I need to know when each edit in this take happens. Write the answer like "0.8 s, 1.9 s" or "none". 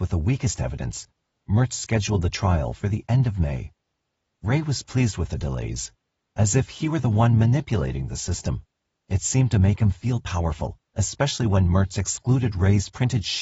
10.8 s